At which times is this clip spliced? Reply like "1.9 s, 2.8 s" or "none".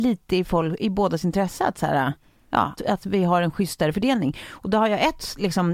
2.8 s